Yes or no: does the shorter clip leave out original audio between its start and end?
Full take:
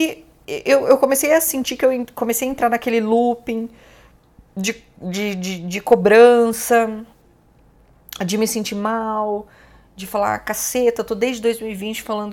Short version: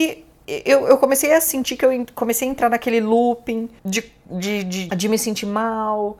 yes